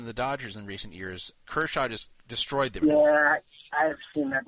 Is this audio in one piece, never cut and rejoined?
no; 1 cut; at 2.8 s

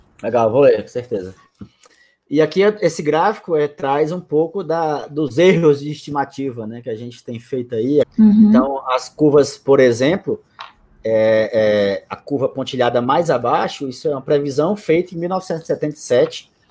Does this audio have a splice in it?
yes; 1 cut; at 8.0 s

